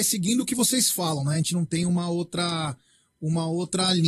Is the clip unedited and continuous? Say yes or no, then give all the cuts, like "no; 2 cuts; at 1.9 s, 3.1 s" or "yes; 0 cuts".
yes; 0 cuts